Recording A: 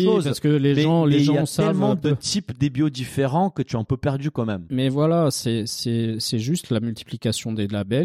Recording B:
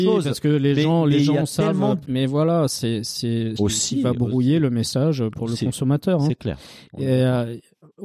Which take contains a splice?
B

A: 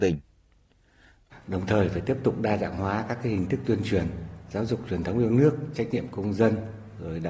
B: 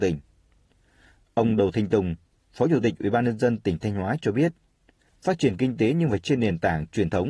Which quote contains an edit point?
A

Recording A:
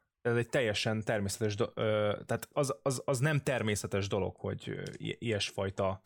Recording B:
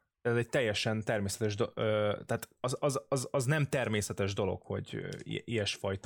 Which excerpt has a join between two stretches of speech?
A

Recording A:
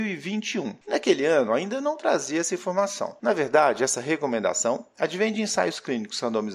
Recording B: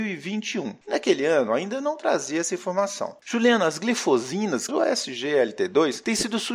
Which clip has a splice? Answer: B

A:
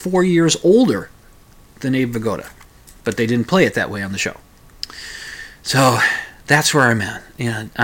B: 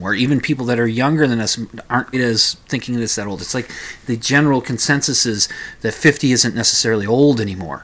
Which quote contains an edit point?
B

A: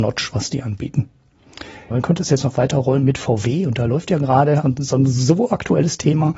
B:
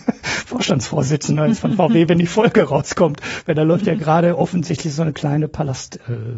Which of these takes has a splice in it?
A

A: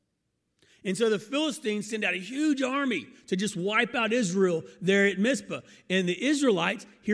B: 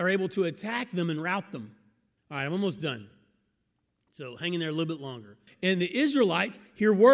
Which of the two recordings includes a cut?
B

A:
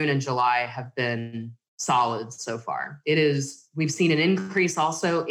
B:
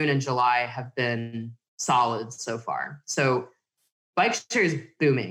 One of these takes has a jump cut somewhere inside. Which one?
A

